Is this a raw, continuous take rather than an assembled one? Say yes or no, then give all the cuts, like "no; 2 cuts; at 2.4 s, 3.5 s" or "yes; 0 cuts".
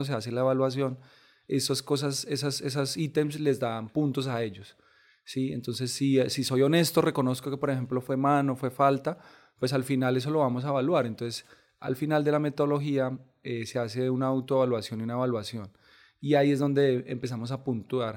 yes; 0 cuts